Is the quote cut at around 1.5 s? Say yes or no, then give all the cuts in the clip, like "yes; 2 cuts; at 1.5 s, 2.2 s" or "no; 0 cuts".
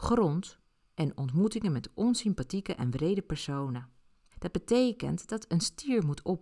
no; 1 cut; at 4.3 s